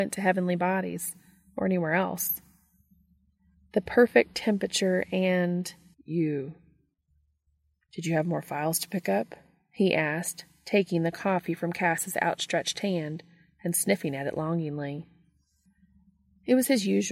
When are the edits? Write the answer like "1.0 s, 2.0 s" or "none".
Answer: 5.9 s

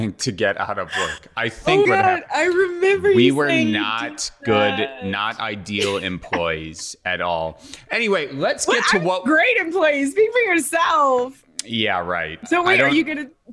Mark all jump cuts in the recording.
1.8 s

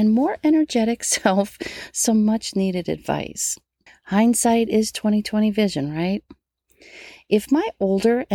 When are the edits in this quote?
3.9 s

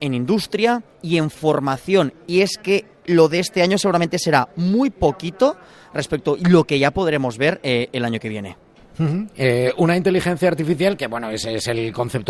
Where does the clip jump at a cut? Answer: 0.9 s

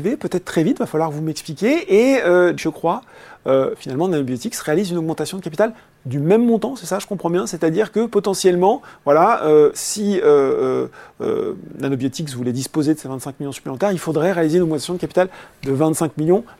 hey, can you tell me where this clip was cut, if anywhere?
2.6 s

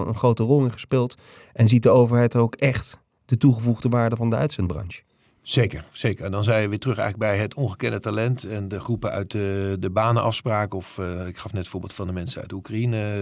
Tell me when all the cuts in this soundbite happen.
none

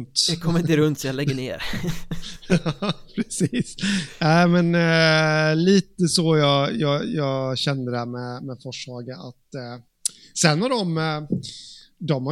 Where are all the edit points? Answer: none

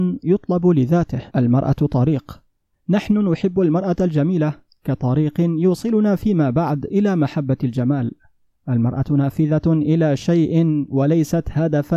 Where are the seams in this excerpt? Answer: 1.3 s

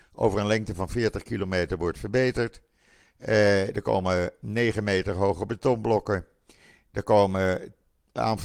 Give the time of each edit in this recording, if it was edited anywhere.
none

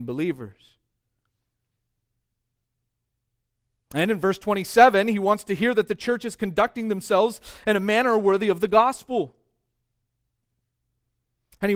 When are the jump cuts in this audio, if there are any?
none

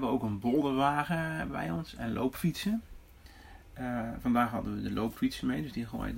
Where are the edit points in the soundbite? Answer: none

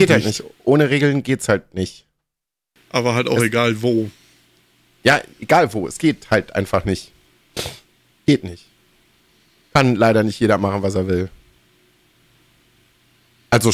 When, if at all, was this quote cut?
none

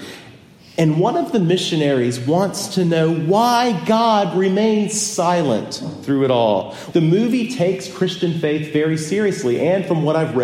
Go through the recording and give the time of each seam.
6.9 s

